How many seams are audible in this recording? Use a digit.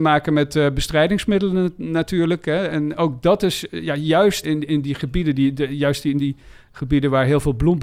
1